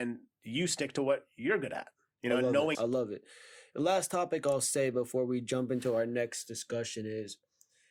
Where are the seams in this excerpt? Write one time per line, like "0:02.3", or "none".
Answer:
0:02.7